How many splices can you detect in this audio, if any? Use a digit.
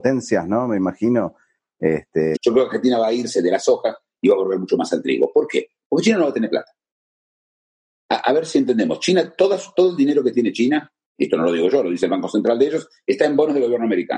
1